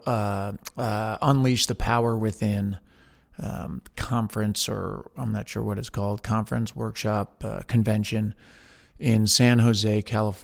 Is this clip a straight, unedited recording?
yes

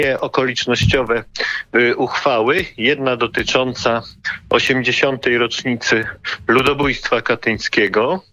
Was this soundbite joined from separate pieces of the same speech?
no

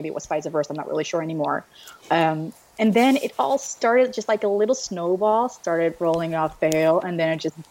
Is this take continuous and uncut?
yes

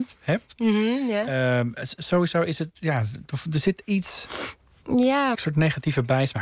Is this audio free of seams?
no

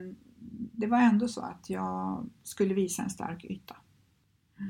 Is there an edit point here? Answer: no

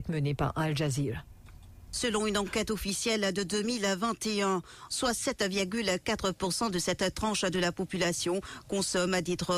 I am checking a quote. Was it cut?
yes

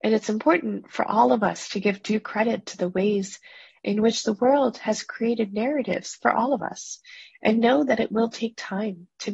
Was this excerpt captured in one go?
yes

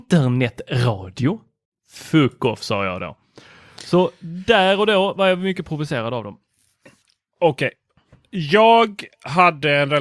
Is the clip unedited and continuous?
yes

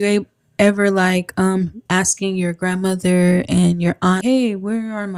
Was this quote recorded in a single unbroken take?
no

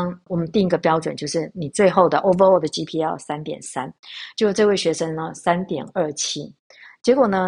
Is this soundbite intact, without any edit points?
yes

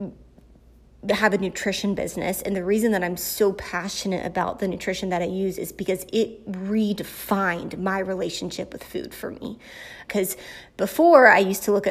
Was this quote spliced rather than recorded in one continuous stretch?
yes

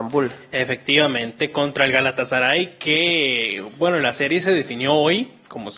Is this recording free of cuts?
yes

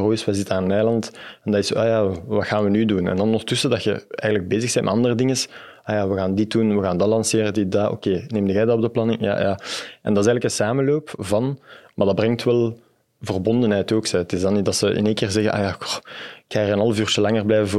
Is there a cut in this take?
no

